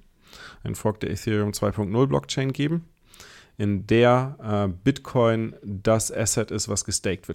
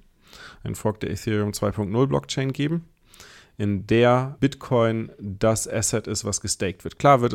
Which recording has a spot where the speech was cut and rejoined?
second; 1 cut; at 4.4 s

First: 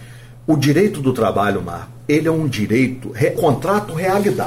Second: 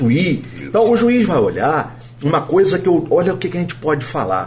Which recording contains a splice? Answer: first; 1 cut; at 3.4 s

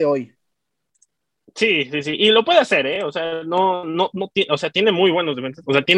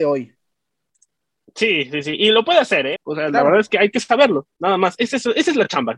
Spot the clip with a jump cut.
second; 1 cut; at 3.0 s

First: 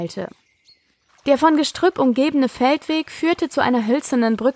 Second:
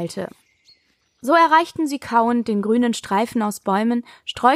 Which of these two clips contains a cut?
first; 1 cut; at 1.1 s

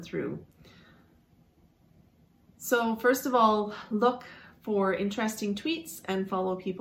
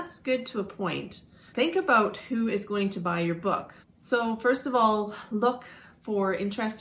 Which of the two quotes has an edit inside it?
second; 2 cuts; at 1.5 s, 3.8 s

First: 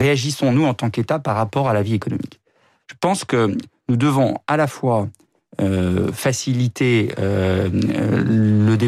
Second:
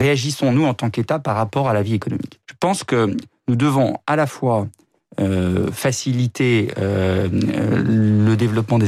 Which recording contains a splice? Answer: second; 1 cut; at 2.4 s

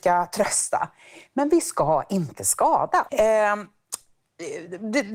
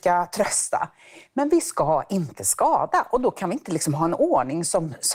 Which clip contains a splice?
first; 1 cut; at 3.1 s

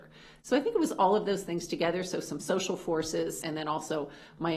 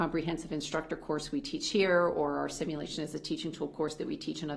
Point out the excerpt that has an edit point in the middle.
first; 1 cut; at 3.4 s

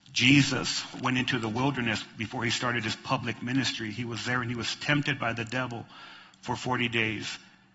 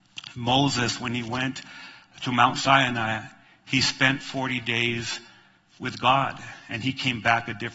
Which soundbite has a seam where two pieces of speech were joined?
first; 1 cut; at 0.9 s

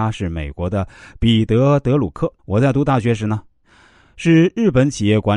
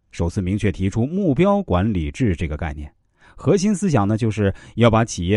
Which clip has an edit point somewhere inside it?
first; 1 cut; at 2.4 s

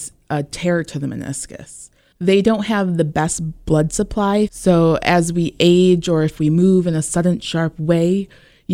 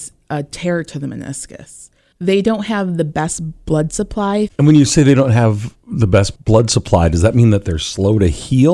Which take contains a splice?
second; 1 cut; at 4.5 s

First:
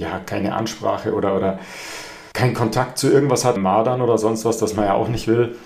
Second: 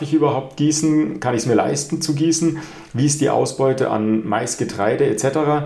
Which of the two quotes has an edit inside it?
first; 2 cuts; at 2.3 s, 3.6 s

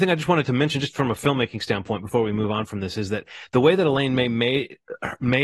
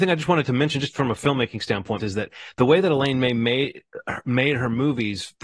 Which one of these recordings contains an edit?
second; 1 cut; at 2.0 s

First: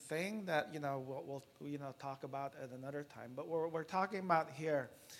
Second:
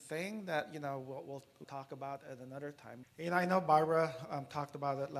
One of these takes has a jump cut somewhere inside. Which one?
second; 2 cuts; at 1.6 s, 3.0 s

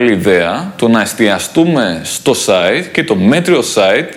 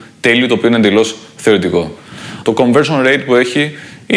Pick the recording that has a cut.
second; 1 cut; at 2.4 s

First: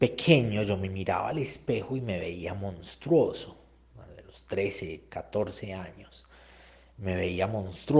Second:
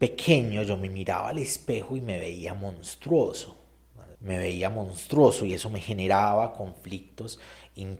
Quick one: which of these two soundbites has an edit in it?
second; 1 cut; at 4.1 s

